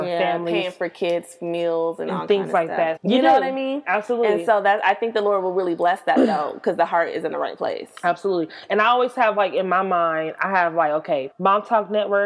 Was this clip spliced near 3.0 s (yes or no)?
yes